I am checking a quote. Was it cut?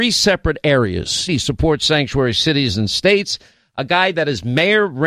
yes; 1 cut; at 1.3 s

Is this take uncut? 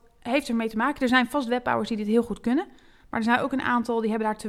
yes; 0 cuts

